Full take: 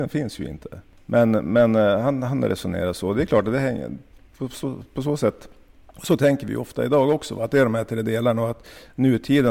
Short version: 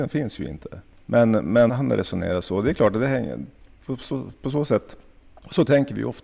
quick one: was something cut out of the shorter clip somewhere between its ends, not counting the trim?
yes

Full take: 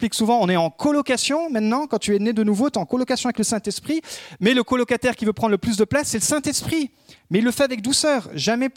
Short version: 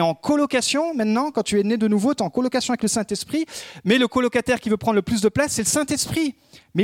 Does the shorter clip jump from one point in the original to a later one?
no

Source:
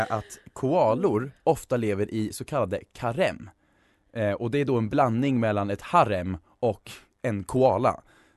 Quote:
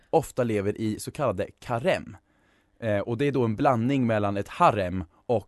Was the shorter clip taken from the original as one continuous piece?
yes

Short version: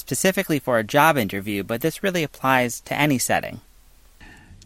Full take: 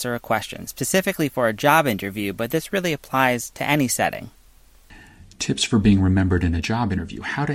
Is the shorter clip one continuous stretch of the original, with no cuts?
yes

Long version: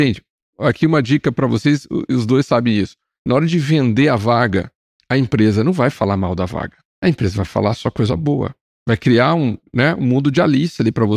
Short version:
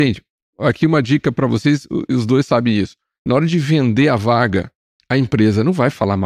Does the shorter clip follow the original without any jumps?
yes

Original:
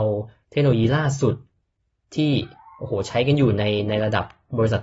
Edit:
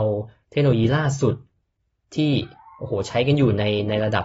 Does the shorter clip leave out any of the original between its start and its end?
no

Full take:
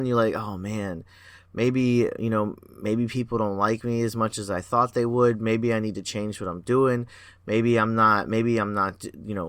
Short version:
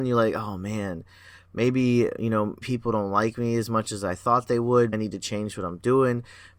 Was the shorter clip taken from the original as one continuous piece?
no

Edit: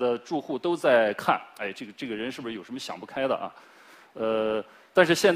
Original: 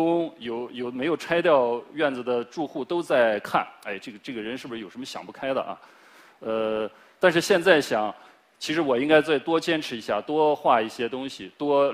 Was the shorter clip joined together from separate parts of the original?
no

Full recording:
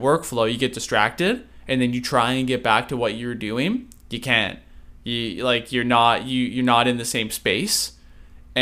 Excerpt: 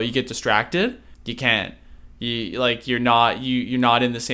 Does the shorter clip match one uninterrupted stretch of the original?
no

